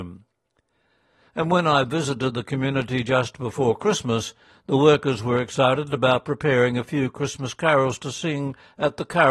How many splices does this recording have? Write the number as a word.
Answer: zero